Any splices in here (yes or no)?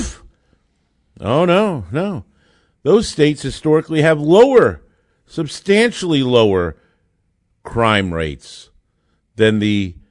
no